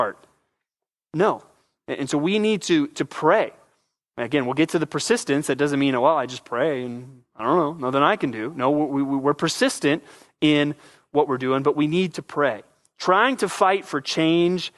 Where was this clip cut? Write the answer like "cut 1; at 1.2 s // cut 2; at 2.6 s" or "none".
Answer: none